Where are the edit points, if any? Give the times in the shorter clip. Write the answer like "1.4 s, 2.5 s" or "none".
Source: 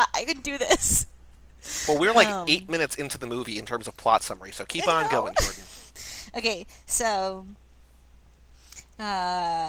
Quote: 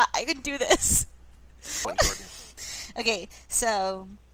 1.8 s